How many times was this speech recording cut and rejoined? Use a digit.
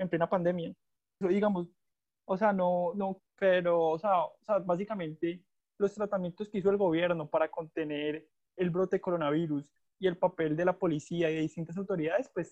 3